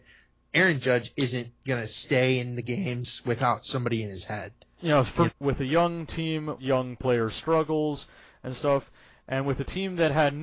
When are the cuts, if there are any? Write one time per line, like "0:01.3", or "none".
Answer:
0:05.3
0:06.6

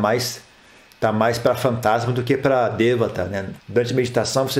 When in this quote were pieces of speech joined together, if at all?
0:03.6

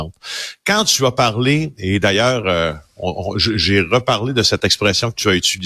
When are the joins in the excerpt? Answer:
none

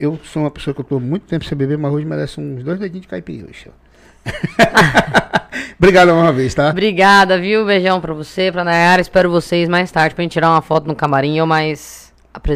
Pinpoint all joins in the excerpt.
none

